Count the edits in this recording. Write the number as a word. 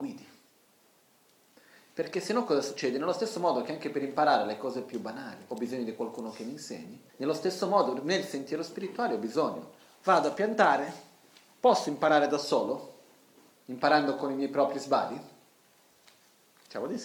two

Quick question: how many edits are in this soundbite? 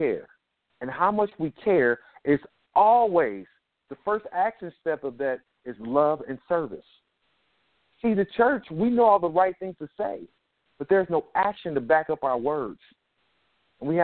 zero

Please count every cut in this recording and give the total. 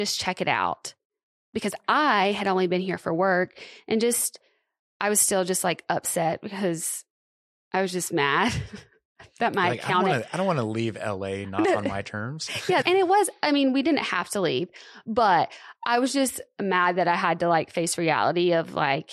one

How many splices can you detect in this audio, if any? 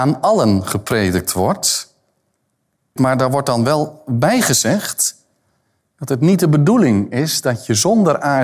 one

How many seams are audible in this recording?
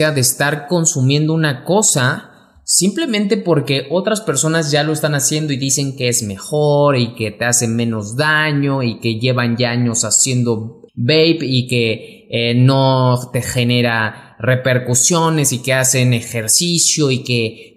one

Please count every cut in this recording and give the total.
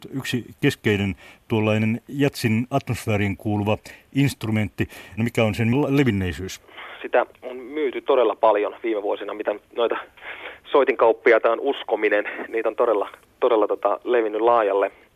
two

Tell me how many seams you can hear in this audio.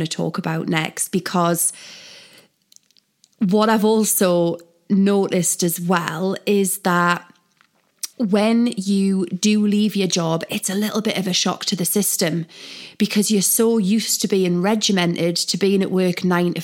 one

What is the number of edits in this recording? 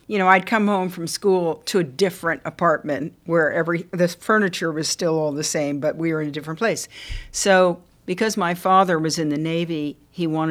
zero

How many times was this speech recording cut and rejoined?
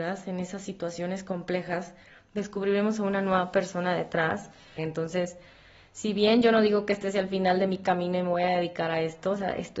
one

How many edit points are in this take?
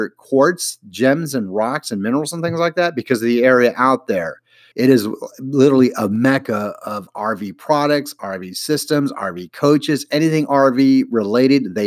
one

